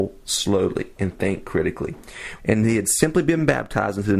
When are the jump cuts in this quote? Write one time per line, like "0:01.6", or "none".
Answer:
0:02.4